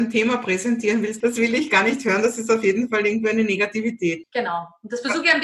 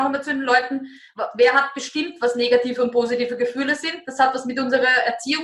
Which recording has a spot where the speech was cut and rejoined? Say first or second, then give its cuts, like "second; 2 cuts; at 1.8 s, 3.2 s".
first; 2 cuts; at 1.2 s, 4.2 s